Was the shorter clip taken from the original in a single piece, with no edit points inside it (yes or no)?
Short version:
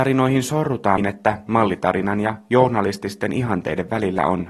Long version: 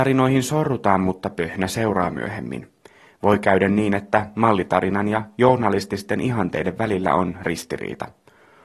no